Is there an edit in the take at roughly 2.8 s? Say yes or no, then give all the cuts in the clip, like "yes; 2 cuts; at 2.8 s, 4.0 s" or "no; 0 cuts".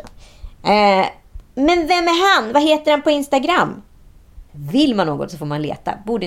no; 2 cuts; at 1.5 s, 4.5 s